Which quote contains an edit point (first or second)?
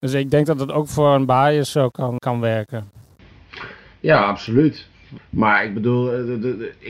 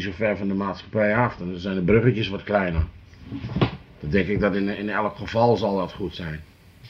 first